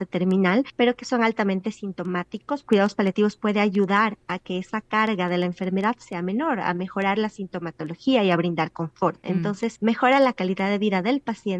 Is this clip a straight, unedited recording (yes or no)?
no